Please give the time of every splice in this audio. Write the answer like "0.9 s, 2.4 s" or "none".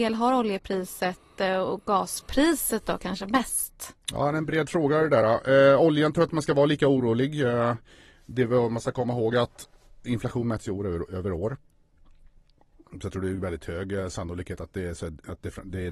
none